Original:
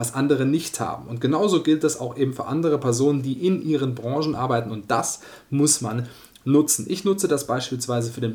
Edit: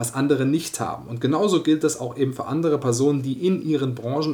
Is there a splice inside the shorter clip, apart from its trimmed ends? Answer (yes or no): no